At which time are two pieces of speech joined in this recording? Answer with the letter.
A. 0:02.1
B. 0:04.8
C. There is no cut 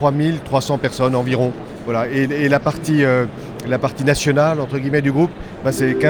C